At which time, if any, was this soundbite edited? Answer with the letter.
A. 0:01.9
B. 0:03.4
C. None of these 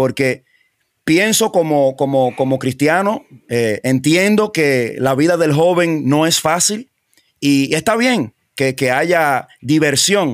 C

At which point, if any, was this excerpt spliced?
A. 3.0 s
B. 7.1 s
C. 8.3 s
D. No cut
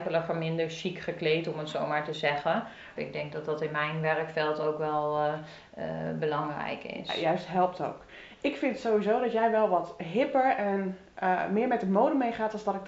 A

